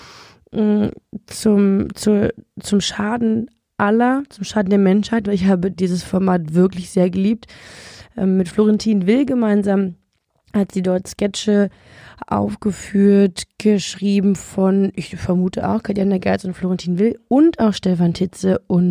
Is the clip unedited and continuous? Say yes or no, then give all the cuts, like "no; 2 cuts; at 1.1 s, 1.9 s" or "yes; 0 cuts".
yes; 0 cuts